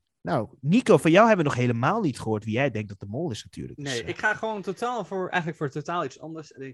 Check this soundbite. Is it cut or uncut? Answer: uncut